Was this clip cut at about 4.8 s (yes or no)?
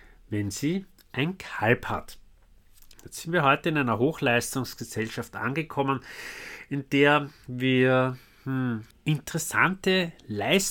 no